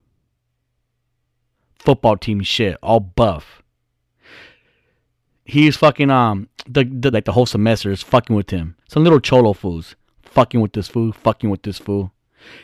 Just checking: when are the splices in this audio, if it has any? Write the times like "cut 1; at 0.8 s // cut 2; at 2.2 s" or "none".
cut 1; at 7.1 s // cut 2; at 8.8 s

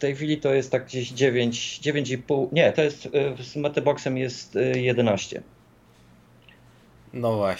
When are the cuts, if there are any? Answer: none

